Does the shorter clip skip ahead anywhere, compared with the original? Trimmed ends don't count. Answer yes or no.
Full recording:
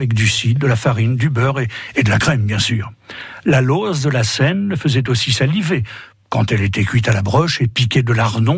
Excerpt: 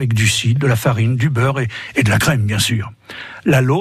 no